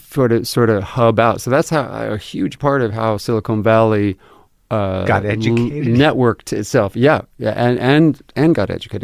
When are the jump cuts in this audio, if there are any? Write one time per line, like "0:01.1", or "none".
none